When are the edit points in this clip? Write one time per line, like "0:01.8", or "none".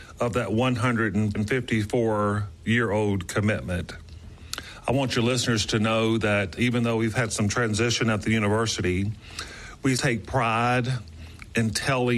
0:06.6
0:09.9